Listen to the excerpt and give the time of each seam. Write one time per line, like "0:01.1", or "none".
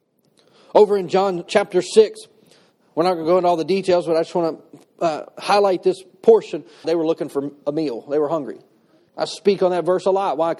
0:01.5
0:06.8
0:09.1